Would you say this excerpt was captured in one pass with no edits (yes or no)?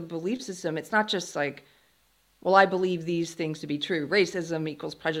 yes